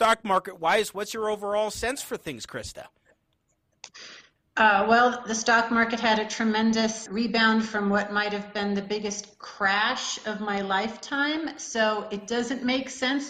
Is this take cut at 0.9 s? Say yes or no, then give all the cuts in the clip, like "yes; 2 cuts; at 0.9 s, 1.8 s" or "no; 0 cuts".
no; 1 cut; at 7.1 s